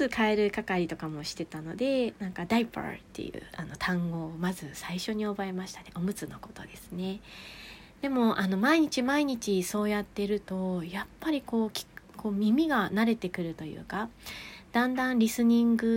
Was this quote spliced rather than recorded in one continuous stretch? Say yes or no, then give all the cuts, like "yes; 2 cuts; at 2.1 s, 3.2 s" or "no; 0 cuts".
no; 0 cuts